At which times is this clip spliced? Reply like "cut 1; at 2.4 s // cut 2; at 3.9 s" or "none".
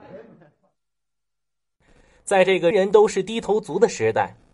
cut 1; at 2.7 s